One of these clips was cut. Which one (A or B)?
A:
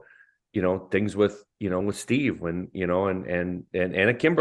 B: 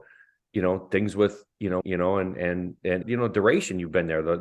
B